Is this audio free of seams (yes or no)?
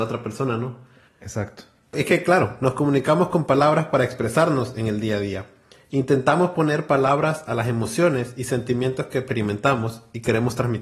yes